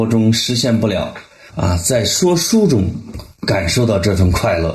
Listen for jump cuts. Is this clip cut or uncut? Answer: cut